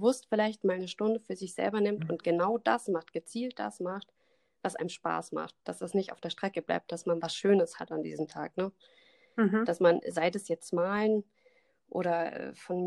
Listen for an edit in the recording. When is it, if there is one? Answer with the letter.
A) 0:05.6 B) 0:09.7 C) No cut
C